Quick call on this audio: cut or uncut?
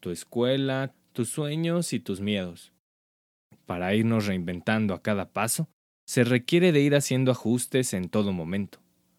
cut